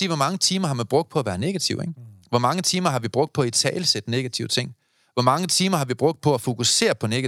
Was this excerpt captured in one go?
yes; 0 cuts

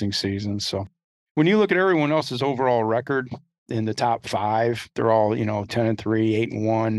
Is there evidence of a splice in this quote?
yes; 1 cut; at 5.7 s

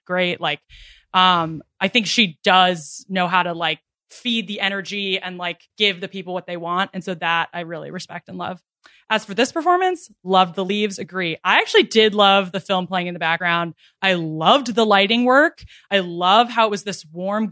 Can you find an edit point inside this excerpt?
yes; 1 cut; at 5.7 s

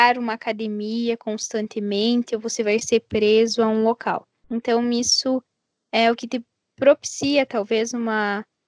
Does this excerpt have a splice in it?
yes; 1 cut; at 4.4 s

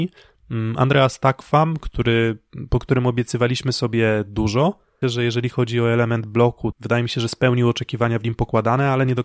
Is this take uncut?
no; 2 cuts; at 5.0 s, 6.7 s

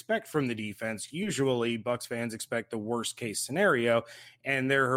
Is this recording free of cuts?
yes; 0 cuts

